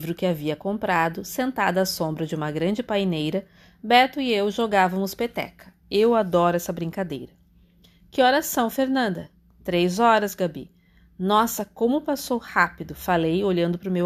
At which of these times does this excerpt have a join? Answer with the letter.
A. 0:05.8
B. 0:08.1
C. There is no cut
C